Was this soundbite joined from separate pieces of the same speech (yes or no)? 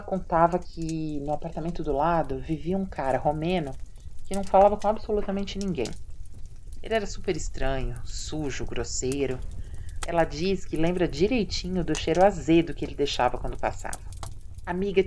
yes